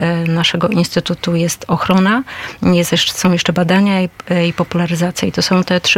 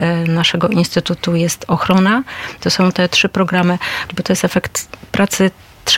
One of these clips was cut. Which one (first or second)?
second